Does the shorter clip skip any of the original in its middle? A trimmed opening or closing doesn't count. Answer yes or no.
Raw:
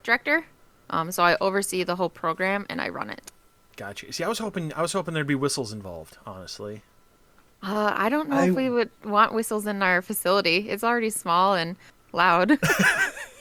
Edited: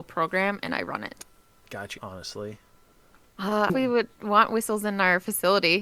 yes